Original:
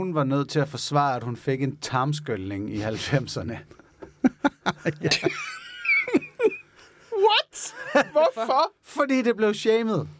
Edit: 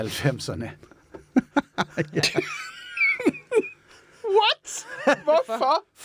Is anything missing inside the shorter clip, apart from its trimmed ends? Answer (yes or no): no